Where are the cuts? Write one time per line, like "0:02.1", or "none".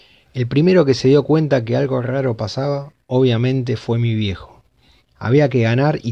0:05.0